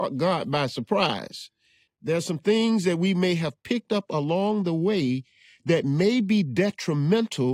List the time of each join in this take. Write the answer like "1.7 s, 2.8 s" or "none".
1.9 s